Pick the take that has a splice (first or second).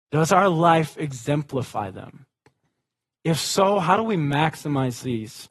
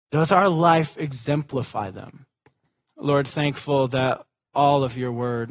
second